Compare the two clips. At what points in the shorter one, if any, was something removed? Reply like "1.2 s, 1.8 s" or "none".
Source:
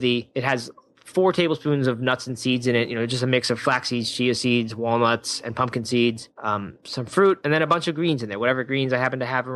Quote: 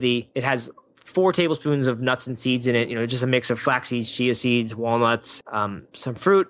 5.4 s